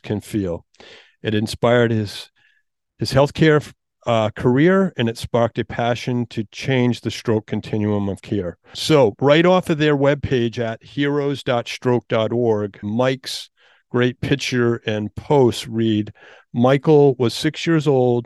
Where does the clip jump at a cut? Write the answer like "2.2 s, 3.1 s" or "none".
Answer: 8.7 s, 12.8 s